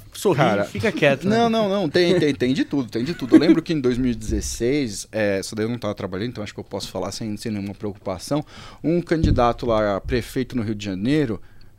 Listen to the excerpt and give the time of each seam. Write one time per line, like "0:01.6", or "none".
none